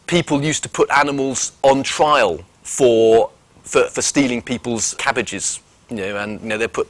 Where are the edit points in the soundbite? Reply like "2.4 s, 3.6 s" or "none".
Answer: 3.9 s, 5.0 s